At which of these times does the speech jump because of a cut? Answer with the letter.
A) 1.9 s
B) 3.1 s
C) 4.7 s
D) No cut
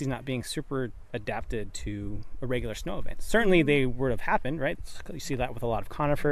C